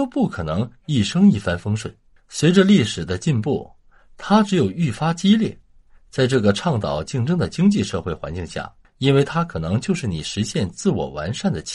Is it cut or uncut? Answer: cut